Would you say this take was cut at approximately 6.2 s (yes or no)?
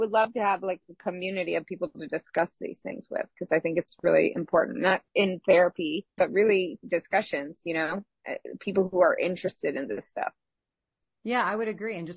yes